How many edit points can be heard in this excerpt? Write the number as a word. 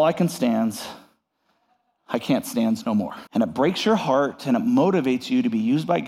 one